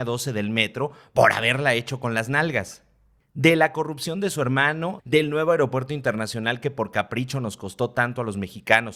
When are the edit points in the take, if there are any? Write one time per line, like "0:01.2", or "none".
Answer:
0:05.0